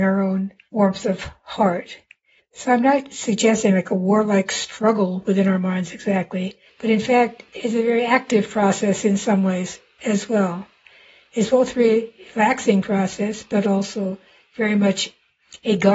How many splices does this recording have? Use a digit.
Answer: 2